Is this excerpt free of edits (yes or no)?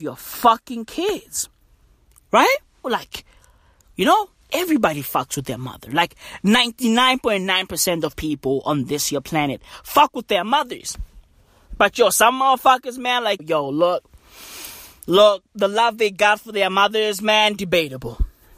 no